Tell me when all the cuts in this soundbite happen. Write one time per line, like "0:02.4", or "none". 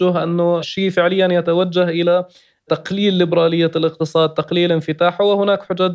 none